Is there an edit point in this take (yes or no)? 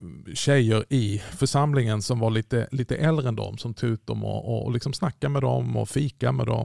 no